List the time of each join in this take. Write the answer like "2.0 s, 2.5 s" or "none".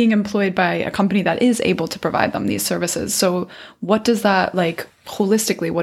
none